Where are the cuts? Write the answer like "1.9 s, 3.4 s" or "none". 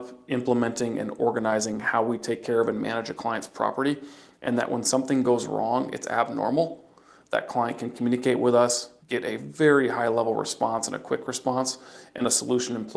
9.0 s